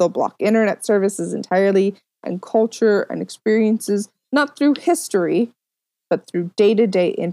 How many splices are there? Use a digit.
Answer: 1